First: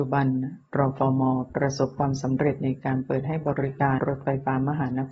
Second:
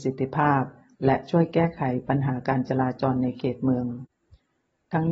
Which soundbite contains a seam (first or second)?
first